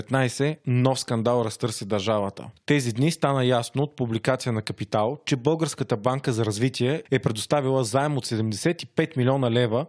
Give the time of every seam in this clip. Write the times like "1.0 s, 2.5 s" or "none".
none